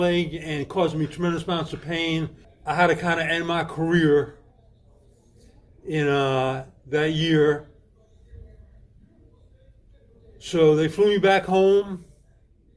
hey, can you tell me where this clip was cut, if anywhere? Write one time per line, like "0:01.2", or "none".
0:02.4